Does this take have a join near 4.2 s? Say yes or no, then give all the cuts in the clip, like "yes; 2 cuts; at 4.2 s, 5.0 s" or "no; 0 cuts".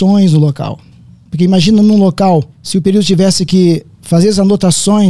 no; 2 cuts; at 1.2 s, 2.5 s